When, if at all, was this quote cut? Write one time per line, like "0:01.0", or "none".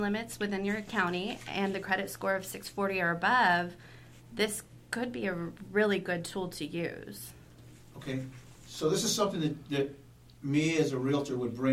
none